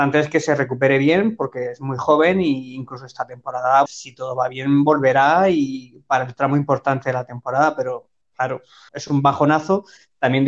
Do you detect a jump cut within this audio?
yes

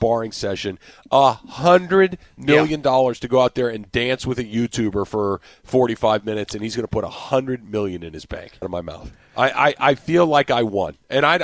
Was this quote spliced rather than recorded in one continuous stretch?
yes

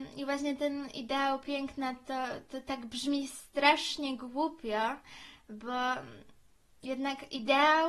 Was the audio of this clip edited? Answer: no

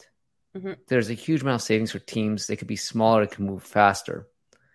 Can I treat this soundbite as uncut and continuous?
yes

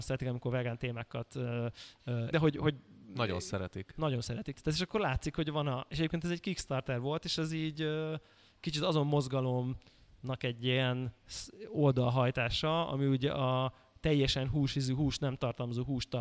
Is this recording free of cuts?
no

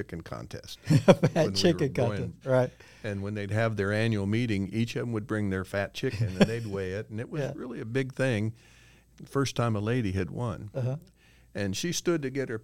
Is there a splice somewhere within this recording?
yes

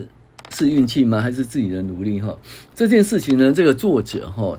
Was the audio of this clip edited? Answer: no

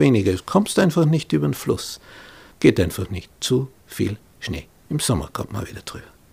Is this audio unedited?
no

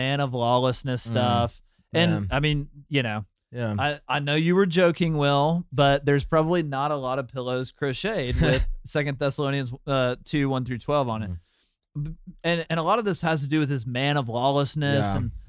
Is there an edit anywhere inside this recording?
yes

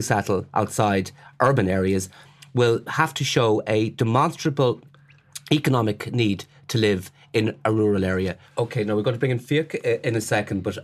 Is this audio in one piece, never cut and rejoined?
no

